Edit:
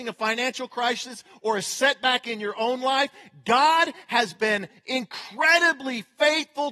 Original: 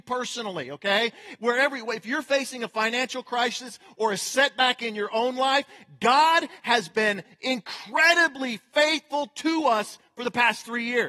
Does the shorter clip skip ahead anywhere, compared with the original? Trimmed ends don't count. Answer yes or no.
no